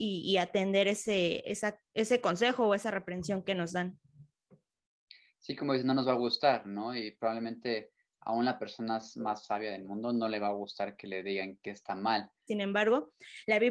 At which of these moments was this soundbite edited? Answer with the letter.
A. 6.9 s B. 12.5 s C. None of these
B